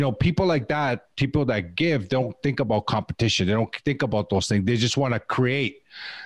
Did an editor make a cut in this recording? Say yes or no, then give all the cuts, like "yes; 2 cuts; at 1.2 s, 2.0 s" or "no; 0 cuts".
no; 0 cuts